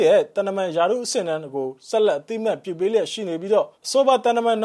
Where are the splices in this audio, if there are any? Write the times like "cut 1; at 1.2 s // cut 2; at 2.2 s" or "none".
cut 1; at 3.7 s